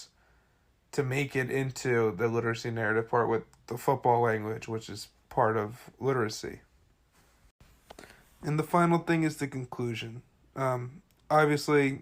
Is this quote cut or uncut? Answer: uncut